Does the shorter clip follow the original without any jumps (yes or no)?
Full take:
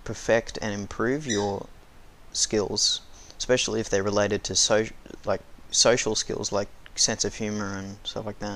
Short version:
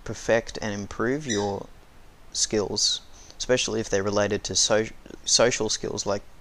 no